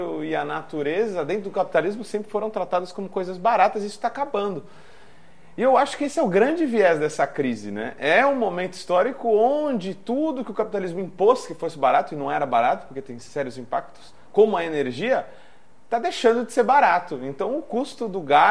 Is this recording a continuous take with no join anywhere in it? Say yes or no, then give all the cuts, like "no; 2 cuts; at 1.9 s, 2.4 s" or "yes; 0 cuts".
yes; 0 cuts